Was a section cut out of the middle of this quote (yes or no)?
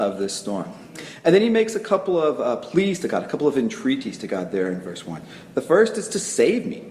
no